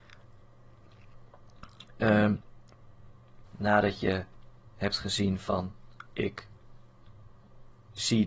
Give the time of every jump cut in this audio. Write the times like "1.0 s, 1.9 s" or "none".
3.4 s, 6.1 s